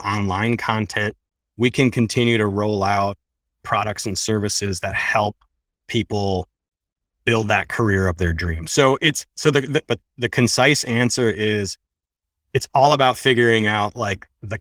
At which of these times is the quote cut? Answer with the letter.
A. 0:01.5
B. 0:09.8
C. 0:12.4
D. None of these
B